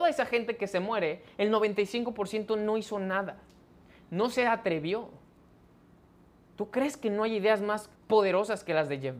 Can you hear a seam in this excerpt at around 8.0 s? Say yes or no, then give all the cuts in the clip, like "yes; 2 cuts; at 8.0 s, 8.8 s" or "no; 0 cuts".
yes; 1 cut; at 8.0 s